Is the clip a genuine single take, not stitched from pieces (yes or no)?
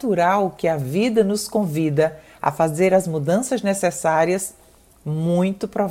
yes